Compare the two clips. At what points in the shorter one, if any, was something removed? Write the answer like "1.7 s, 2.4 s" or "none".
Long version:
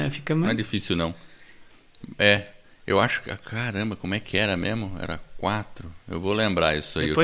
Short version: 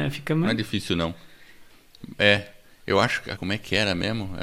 3.4 s